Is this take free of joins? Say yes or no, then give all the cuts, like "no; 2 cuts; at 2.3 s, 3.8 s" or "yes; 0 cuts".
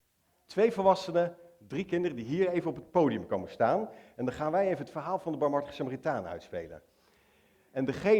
yes; 0 cuts